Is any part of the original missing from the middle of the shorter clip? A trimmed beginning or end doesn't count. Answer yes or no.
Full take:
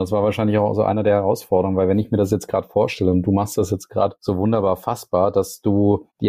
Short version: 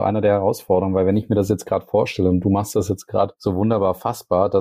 no